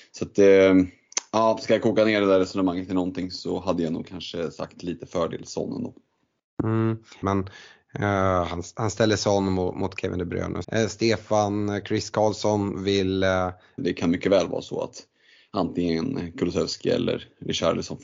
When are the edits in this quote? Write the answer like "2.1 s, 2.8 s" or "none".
7.2 s, 10.6 s, 13.8 s